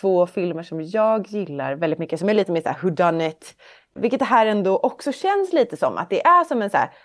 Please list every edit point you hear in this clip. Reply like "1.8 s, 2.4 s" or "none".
none